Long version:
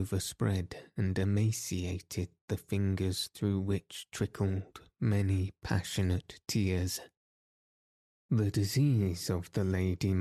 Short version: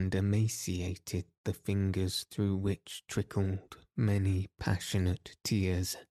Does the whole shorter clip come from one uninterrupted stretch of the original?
yes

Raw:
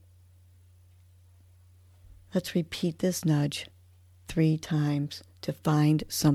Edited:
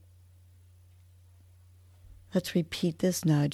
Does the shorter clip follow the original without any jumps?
yes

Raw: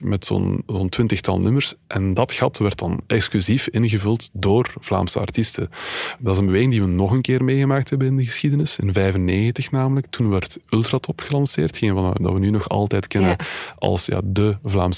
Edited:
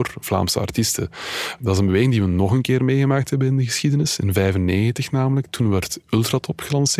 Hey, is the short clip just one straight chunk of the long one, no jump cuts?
yes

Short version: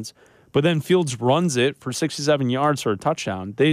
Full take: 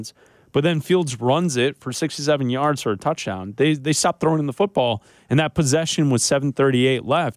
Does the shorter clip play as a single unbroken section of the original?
yes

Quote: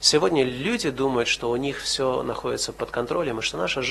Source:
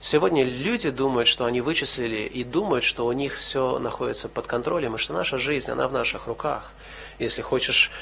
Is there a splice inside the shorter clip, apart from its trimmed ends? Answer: yes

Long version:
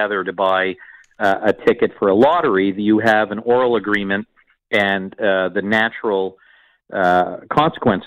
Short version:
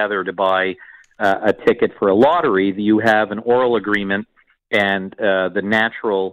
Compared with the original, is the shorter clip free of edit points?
yes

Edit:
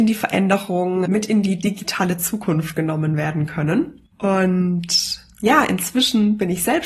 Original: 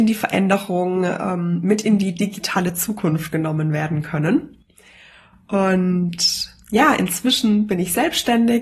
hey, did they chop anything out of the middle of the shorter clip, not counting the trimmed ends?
yes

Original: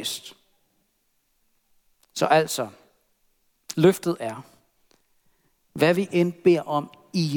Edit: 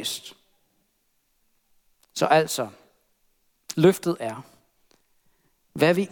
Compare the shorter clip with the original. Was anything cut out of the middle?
no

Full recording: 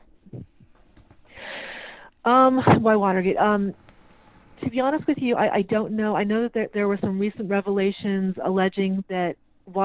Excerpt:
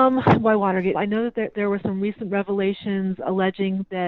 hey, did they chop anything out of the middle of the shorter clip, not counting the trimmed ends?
yes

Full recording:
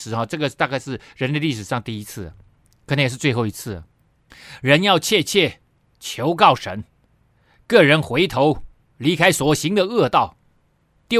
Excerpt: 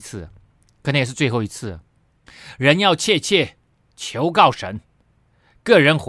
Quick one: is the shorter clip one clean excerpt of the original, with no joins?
yes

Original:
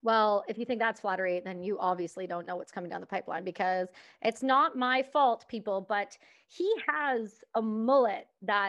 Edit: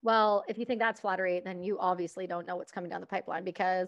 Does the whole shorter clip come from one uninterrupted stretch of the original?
yes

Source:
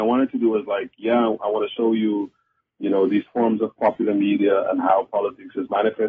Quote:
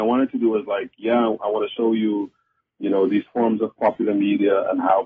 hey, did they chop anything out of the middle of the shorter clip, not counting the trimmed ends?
no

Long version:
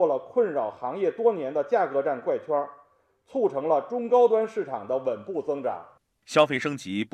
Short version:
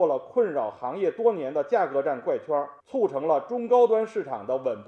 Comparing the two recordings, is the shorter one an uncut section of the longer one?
no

